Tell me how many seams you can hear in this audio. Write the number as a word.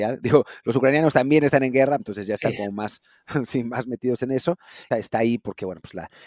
two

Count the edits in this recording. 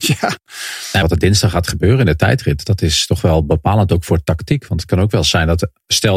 one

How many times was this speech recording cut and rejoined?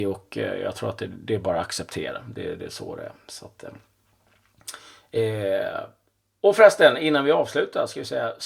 zero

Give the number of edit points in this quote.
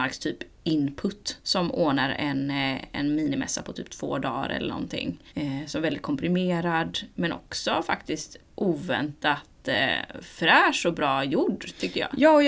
two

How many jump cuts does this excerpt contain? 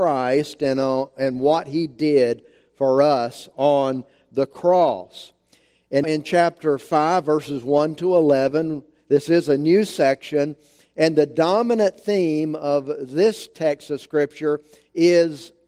one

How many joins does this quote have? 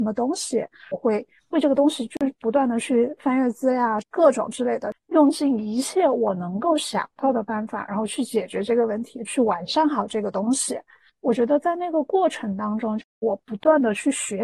one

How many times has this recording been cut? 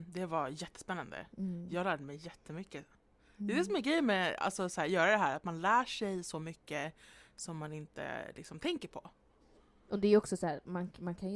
zero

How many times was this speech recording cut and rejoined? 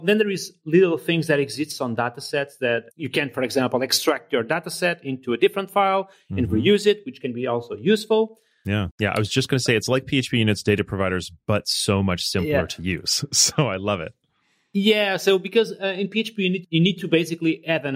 one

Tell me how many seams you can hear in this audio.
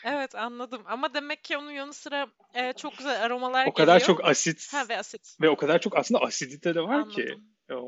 zero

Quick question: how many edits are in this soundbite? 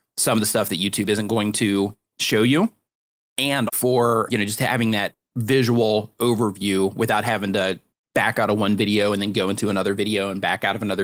one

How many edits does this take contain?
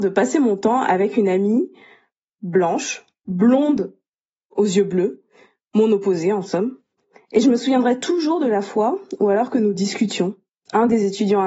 zero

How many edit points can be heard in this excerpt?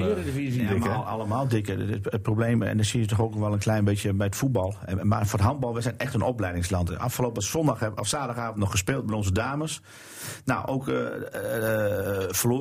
zero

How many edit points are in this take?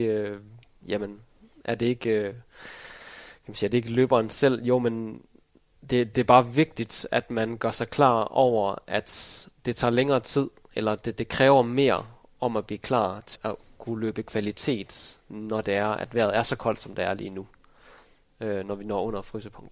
two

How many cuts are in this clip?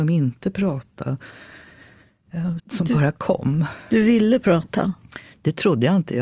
one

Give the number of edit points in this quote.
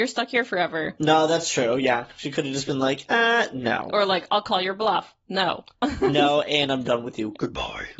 zero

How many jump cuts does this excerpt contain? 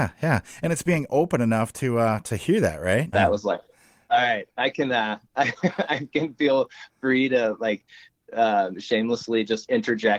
one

